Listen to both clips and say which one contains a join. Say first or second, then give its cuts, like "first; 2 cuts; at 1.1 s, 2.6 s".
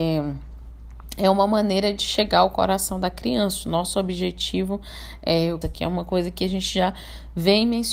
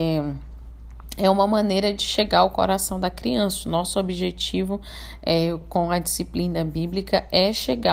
first; 1 cut; at 5.6 s